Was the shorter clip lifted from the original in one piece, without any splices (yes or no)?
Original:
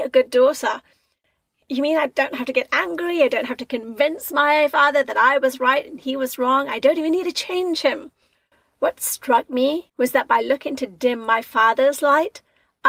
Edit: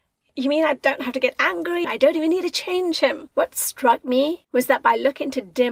no